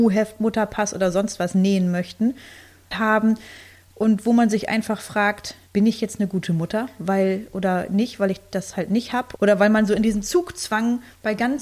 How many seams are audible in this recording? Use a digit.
3